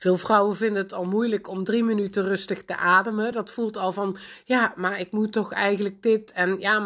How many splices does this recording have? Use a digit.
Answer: 0